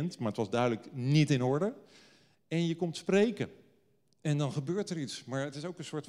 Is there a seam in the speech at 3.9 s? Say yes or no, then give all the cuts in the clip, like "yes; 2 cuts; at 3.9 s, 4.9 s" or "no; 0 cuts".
no; 0 cuts